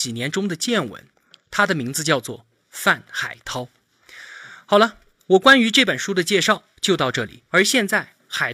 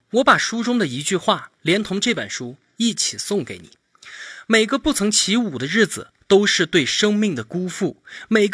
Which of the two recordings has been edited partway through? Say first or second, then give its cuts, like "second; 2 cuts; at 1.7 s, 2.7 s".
first; 2 cuts; at 1.1 s, 7.5 s